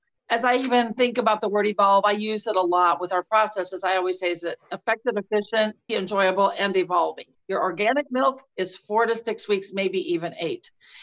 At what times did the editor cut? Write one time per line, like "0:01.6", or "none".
0:05.9
0:07.3